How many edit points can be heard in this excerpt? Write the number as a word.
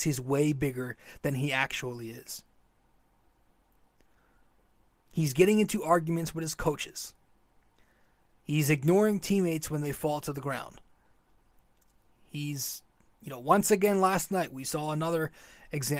one